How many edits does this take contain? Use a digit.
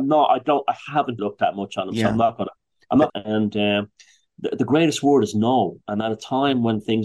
2